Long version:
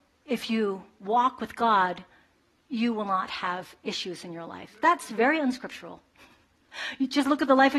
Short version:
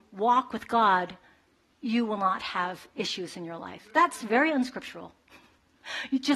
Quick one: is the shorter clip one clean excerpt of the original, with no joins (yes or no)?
yes